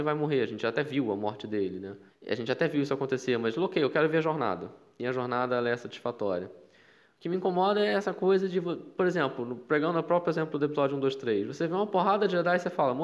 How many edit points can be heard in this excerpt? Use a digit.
1